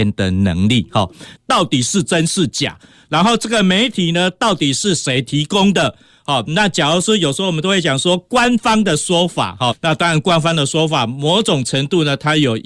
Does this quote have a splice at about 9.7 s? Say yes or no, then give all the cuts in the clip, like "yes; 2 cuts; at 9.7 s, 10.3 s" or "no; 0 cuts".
yes; 2 cuts; at 1.3 s, 9.7 s